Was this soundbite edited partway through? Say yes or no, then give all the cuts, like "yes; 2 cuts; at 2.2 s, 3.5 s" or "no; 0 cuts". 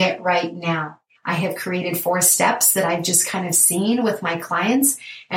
yes; 1 cut; at 1.1 s